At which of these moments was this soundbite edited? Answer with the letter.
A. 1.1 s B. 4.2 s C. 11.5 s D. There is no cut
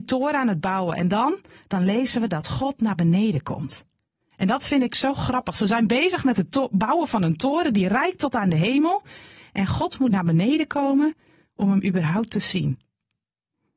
D